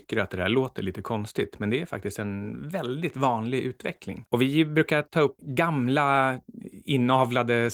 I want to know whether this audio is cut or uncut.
cut